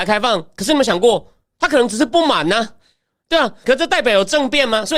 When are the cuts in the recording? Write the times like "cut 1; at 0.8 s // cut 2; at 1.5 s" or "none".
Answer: cut 1; at 3.6 s